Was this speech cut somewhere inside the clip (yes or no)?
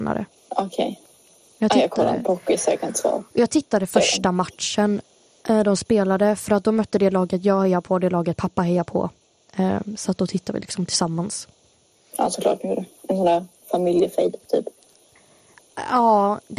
no